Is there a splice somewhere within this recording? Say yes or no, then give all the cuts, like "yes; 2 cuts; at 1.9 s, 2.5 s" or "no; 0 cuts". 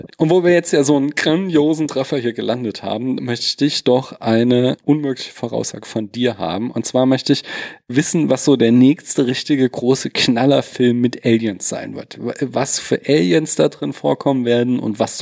no; 0 cuts